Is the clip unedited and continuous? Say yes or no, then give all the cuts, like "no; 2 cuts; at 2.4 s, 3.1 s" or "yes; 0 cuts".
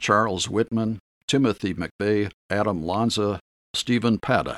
no; 1 cut; at 2.4 s